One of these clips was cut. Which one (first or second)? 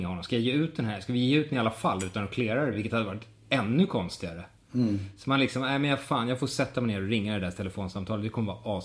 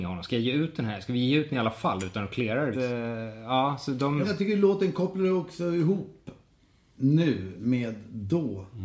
second